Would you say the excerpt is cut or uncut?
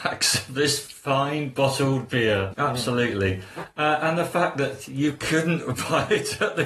cut